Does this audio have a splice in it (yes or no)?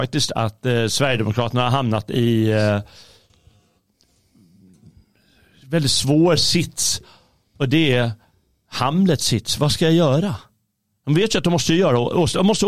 no